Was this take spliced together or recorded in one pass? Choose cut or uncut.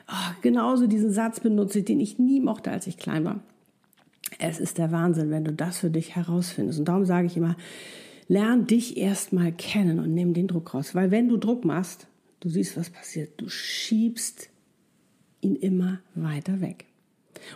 uncut